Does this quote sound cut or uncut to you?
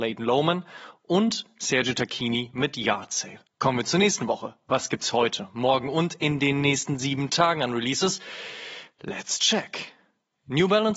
cut